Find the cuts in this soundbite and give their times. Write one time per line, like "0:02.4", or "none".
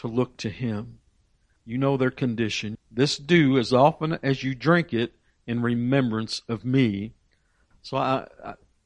0:01.6
0:02.8
0:07.7

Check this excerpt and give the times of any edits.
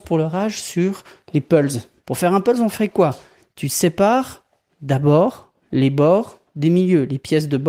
0:02.0

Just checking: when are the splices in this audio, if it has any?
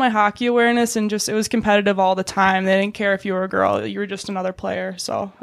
none

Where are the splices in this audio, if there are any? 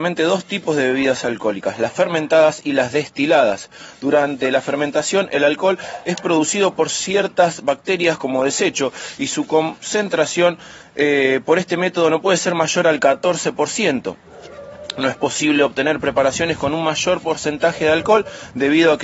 none

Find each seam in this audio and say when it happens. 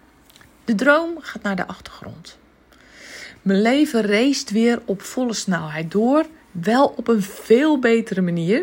none

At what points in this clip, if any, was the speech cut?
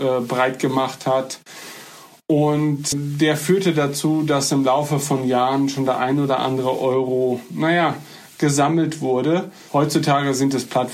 0:02.9
0:09.7

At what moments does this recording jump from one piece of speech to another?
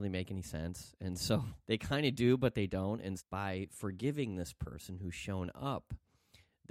0:01.6
0:03.2

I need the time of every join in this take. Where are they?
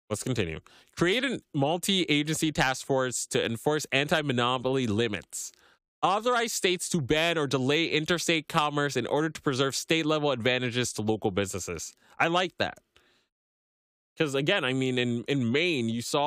none

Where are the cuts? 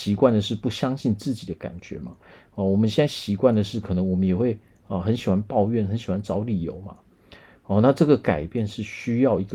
none

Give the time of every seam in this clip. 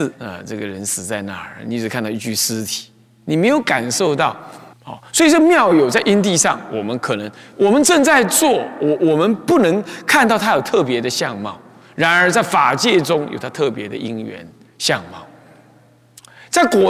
0:04.7

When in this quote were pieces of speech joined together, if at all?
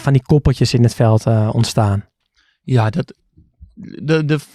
none

